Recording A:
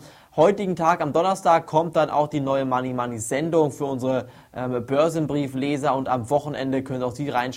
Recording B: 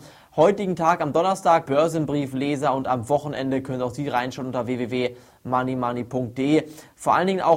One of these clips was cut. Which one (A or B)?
B